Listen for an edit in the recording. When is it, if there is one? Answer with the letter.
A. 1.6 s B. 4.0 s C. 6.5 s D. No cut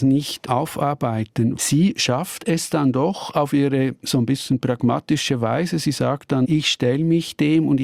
A